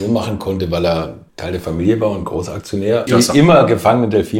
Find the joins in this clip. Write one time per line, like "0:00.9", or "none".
0:01.3
0:03.1